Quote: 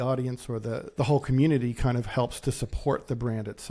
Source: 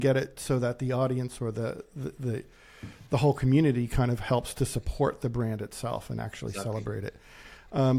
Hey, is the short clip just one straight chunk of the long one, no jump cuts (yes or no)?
no